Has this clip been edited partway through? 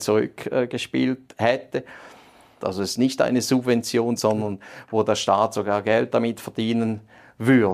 yes; 2 cuts; at 2.6 s, 4.2 s

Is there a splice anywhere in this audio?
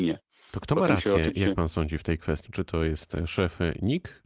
yes; 1 cut; at 2.5 s

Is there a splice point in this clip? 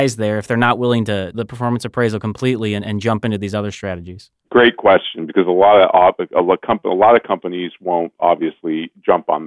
yes; 1 cut; at 1.3 s

